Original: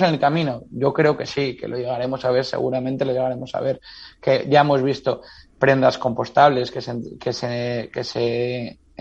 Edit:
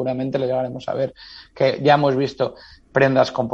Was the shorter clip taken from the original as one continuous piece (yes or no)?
yes